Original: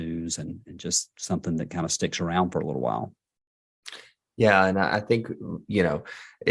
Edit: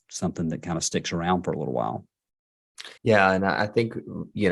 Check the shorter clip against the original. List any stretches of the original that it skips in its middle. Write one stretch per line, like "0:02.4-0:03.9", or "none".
0:04.0-0:04.3

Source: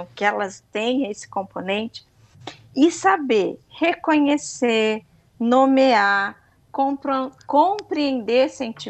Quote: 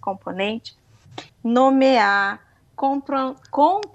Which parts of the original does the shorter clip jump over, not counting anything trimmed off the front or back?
0:02.6-0:05.2

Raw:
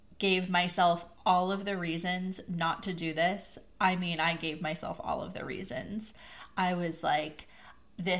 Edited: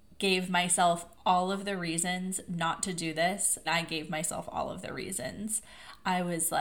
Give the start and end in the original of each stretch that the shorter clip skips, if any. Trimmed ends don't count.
0:03.7-0:04.2

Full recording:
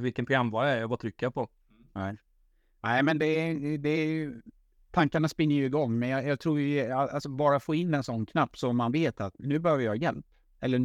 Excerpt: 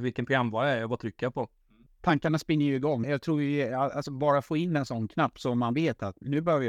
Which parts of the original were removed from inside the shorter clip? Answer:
0:01.9-0:04.8
0:05.9-0:06.2

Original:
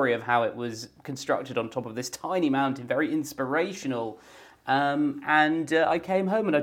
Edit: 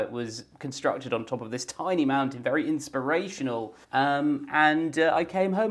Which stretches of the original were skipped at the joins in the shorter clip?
0:04.3-0:04.6

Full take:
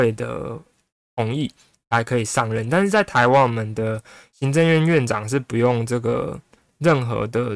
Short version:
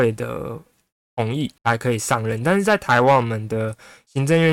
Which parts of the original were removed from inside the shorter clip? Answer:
0:01.6-0:01.8

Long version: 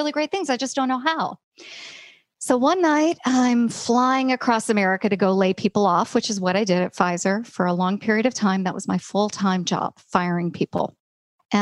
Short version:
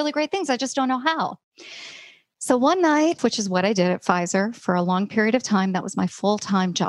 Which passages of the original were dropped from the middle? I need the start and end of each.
0:03.2-0:06.1

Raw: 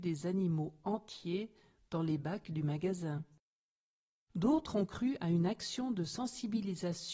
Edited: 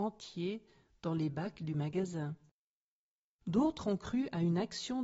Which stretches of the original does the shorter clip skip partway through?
none

